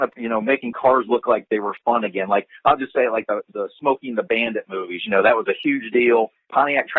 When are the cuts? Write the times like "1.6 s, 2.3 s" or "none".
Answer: none